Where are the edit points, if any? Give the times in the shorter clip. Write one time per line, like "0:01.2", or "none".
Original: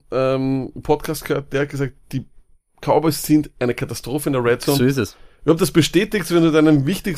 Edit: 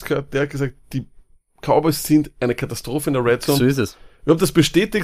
none